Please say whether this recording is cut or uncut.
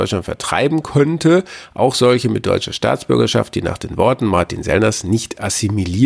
uncut